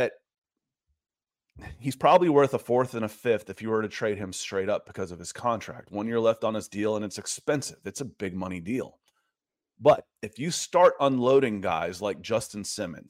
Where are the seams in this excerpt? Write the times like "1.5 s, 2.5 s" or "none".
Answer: none